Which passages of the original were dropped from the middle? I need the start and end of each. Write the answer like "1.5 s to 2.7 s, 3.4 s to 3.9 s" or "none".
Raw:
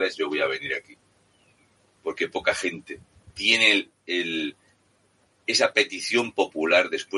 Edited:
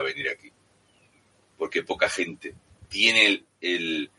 none